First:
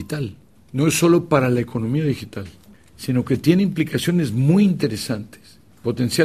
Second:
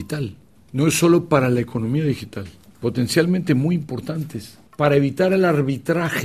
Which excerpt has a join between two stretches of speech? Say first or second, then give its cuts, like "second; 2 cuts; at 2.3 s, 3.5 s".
second; 2 cuts; at 2.7 s, 4.7 s